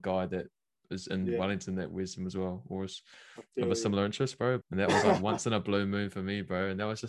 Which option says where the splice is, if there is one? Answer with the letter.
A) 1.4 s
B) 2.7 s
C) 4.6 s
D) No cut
C